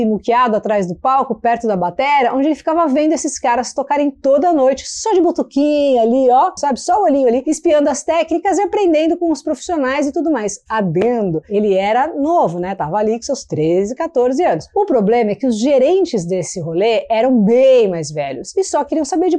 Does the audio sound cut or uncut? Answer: cut